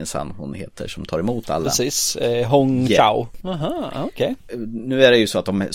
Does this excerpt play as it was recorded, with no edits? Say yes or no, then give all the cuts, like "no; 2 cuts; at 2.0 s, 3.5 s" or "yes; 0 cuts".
no; 1 cut; at 3.4 s